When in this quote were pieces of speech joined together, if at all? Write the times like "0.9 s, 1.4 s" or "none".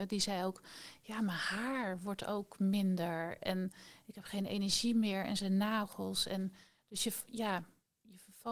none